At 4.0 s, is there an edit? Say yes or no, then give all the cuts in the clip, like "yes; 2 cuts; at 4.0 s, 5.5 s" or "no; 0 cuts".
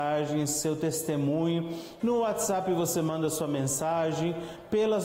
no; 1 cut; at 2.0 s